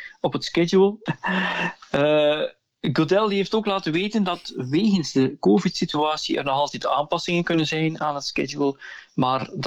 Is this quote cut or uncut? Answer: cut